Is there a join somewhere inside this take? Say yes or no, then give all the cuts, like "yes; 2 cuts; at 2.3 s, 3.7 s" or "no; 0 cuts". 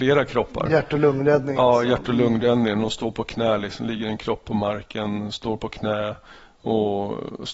no; 0 cuts